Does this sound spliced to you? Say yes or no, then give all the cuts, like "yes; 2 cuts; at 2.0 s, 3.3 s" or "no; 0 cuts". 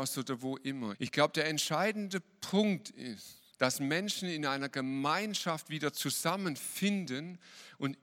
yes; 2 cuts; at 0.9 s, 3.5 s